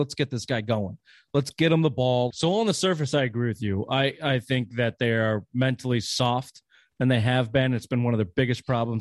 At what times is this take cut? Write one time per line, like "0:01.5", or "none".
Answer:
0:02.3